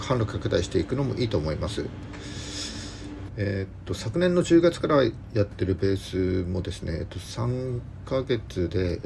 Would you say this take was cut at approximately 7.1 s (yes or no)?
no